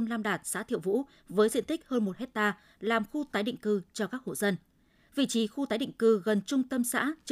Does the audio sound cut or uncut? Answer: uncut